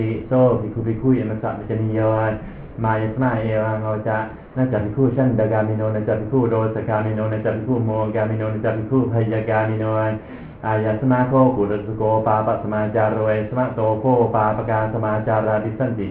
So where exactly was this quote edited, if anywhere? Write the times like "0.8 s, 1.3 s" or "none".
none